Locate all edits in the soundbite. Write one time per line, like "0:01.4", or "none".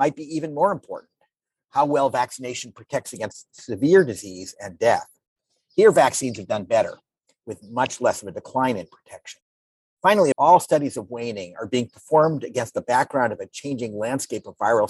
0:10.3

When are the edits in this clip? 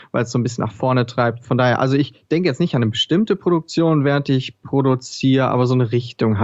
none

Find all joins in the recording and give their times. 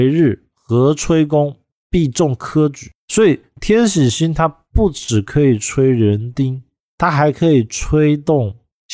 none

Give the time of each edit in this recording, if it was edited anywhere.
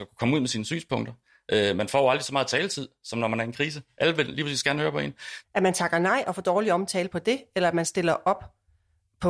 0:05.4

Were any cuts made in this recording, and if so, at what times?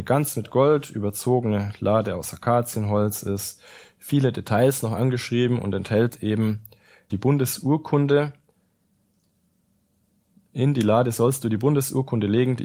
0:07.1

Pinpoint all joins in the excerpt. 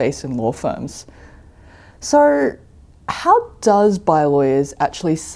none

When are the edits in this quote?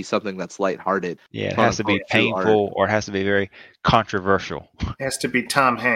0:01.2

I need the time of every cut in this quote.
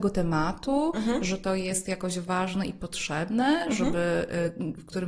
none

